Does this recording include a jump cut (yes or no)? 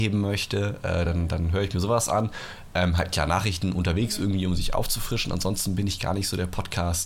no